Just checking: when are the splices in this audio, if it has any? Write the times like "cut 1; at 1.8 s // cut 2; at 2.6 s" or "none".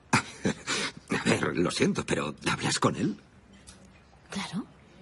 none